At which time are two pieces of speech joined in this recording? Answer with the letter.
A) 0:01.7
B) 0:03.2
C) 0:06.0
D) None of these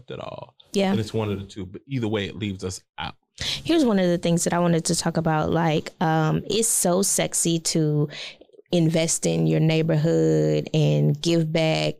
D